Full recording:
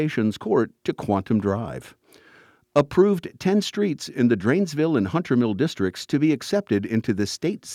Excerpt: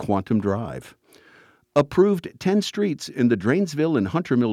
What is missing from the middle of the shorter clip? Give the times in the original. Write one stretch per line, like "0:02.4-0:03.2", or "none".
none

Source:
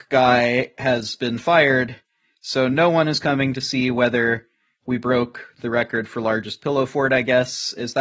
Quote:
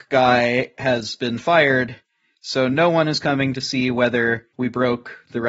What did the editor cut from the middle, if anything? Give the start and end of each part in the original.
0:04.5-0:04.8

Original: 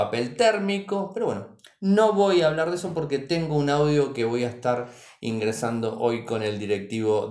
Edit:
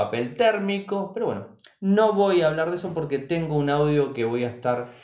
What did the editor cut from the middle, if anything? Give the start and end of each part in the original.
none

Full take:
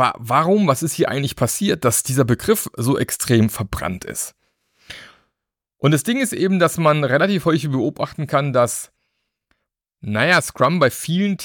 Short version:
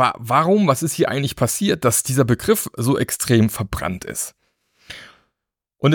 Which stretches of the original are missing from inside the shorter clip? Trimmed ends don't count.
none

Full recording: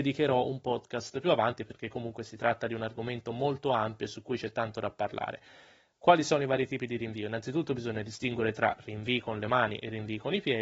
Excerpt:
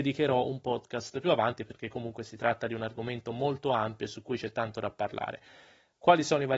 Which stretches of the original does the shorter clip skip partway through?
none

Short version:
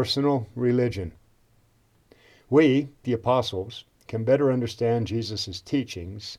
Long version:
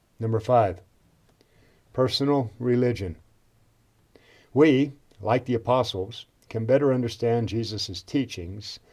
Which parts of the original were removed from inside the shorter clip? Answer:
0:05.1-0:05.4

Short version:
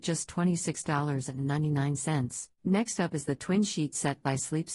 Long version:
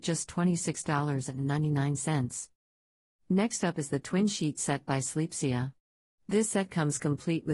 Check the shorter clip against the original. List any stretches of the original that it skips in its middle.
0:02.6-0:03.2

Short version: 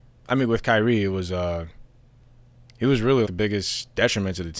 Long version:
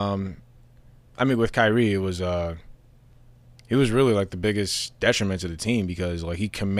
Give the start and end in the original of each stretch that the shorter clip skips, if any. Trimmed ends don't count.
0:04.1-0:04.3

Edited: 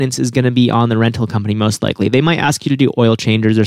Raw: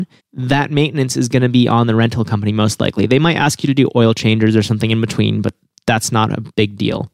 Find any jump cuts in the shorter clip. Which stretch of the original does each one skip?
none

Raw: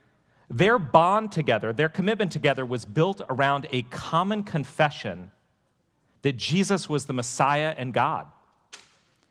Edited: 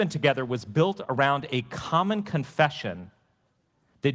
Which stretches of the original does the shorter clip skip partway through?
none

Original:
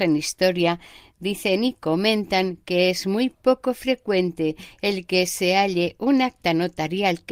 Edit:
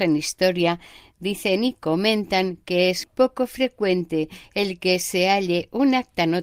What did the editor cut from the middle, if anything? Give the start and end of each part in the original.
0:03.0-0:03.3

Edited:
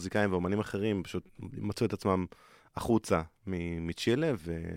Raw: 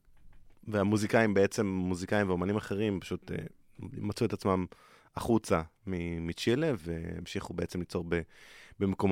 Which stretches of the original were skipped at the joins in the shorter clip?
0:03.2-0:03.7

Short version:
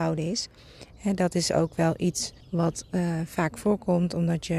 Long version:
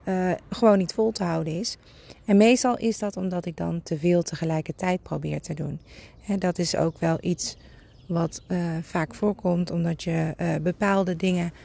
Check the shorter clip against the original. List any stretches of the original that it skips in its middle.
0:02.2-0:06.1
0:07.6-0:08.0

